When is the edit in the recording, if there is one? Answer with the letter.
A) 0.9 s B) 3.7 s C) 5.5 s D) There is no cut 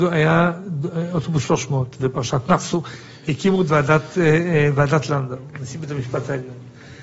D